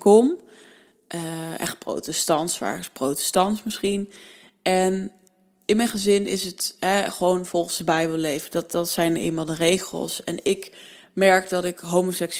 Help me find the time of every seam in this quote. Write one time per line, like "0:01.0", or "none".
none